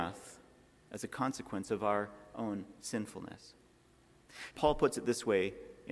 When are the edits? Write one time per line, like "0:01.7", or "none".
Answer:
0:04.5